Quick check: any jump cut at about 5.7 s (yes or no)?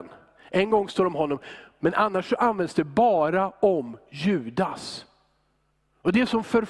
no